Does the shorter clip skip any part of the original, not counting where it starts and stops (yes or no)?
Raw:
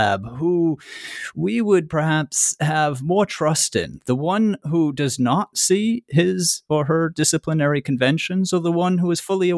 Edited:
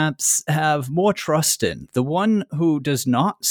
no